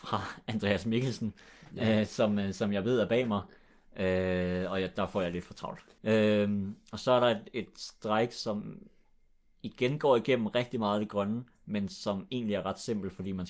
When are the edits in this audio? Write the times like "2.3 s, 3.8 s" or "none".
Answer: 6.0 s